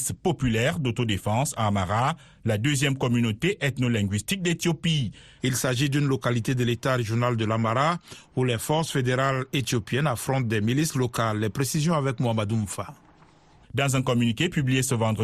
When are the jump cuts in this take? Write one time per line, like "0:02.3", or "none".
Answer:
0:05.4
0:13.6